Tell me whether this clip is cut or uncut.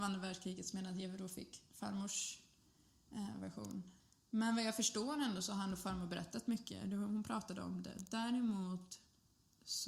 uncut